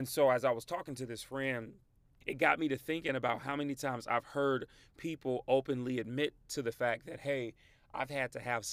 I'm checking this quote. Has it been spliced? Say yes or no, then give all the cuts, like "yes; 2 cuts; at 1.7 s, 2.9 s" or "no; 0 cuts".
yes; 1 cut; at 2.2 s